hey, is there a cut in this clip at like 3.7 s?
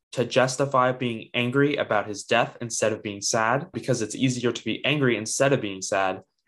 yes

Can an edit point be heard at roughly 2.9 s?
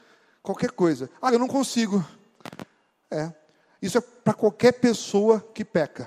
yes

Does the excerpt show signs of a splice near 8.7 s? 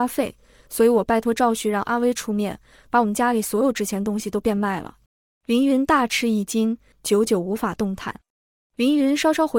no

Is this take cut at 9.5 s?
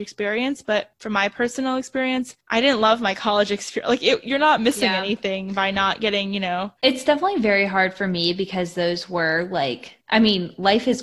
no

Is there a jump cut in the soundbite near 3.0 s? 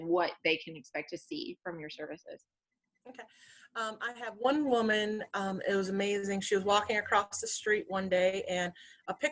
no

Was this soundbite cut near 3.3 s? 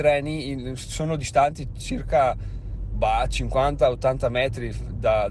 no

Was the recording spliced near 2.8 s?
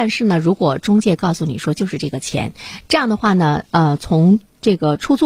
yes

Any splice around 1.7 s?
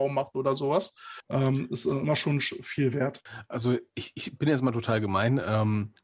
no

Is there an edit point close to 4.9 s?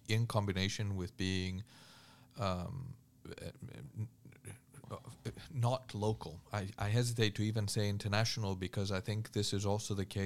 no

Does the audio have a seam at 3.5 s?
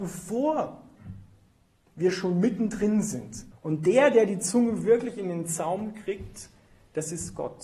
yes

